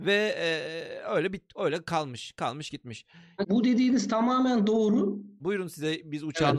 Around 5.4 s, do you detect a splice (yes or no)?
yes